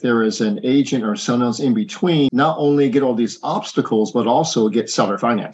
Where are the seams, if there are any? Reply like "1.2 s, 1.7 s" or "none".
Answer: 2.3 s